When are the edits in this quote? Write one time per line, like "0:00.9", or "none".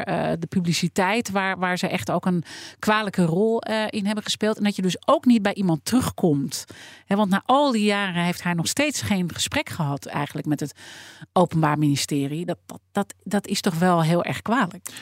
none